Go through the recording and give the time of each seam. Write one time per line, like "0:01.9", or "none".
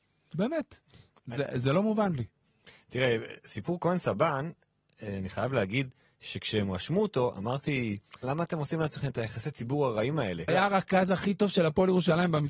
0:08.2
0:10.5